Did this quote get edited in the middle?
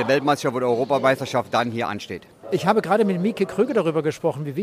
yes; 1 cut; at 2.4 s

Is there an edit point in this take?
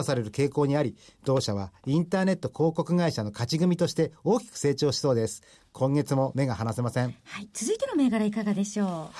no; 0 cuts

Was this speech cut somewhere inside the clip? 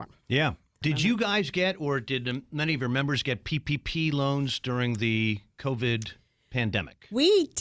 no; 0 cuts

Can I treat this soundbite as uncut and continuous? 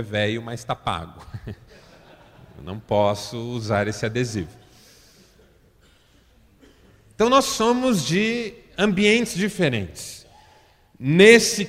yes; 0 cuts

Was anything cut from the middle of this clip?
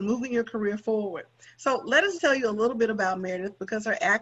yes; 1 cut; at 2.2 s

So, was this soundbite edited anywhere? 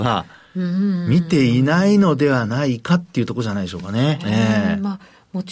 yes; 1 cut; at 4.2 s

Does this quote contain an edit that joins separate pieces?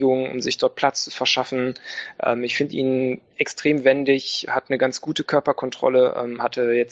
no; 0 cuts

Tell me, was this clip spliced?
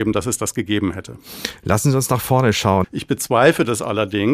yes; 1 cut; at 2.8 s

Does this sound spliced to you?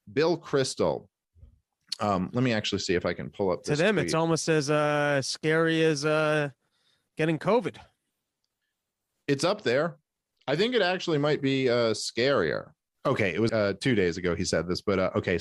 yes; 1 cut; at 13.5 s

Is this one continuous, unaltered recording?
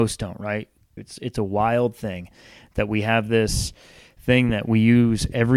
no; 1 cut; at 1.0 s

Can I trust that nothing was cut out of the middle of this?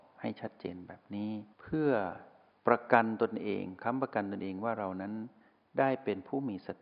no; 1 cut; at 1.5 s

